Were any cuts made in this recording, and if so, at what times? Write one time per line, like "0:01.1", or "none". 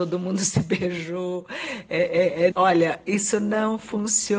0:02.5